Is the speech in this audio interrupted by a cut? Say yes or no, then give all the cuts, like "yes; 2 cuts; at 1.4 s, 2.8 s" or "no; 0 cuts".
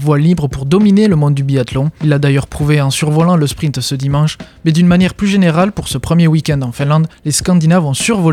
no; 0 cuts